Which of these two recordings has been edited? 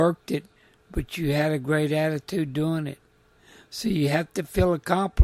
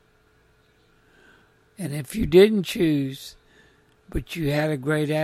second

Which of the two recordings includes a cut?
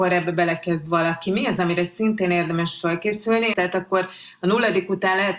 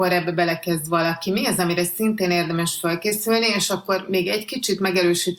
first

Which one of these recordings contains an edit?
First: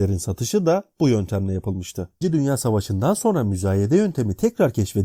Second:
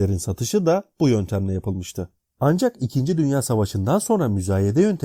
first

